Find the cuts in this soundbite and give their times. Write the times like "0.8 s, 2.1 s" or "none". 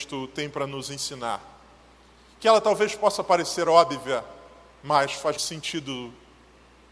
5.4 s